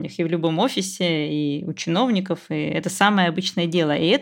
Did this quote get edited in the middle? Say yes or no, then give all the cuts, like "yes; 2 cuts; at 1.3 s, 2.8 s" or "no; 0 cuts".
no; 0 cuts